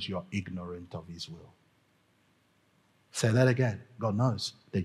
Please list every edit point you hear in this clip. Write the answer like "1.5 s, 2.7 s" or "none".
none